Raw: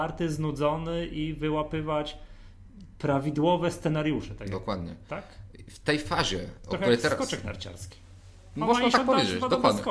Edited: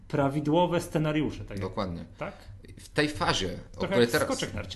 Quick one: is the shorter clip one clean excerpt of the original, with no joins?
yes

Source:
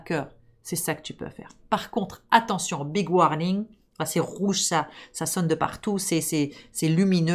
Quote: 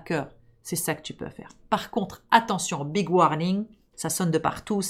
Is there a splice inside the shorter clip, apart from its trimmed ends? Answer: yes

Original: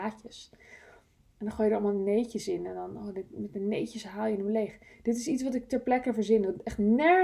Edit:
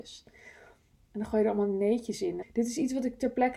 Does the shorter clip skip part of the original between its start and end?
yes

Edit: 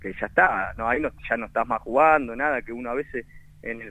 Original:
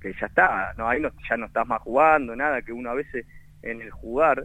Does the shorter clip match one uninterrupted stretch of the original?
yes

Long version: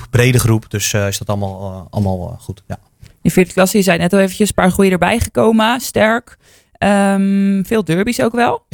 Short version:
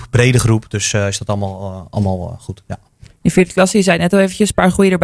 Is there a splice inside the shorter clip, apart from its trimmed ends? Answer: no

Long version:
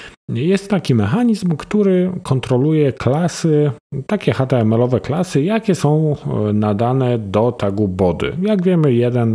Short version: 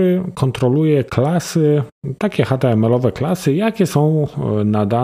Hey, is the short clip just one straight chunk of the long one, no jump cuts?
yes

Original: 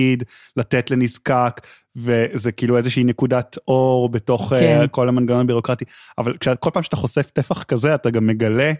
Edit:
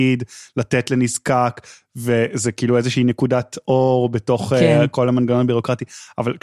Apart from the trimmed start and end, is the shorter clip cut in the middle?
no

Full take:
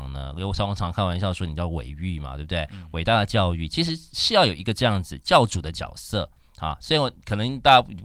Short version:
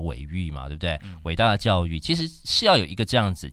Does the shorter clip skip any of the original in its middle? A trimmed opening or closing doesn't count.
no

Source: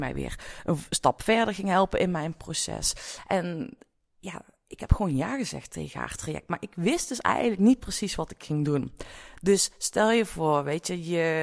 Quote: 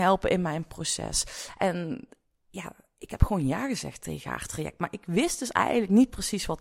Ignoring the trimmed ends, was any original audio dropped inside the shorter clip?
no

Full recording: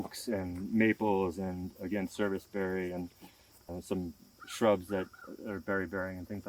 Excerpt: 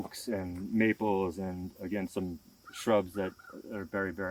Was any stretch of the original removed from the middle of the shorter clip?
yes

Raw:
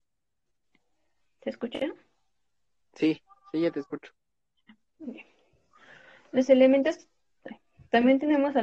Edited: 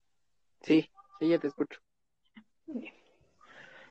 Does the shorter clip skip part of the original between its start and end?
no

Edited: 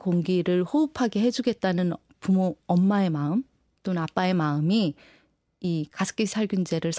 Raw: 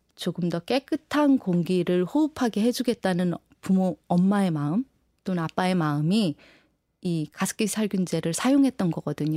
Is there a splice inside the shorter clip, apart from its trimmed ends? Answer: no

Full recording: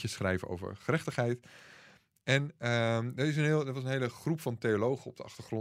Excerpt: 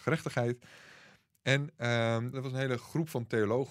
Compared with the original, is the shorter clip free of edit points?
no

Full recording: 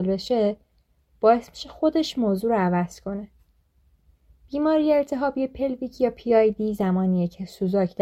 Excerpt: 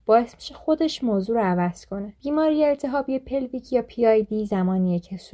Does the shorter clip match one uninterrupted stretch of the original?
no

